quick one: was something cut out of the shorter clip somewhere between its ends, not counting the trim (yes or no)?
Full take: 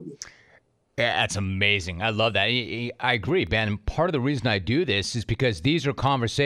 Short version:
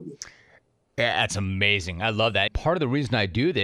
yes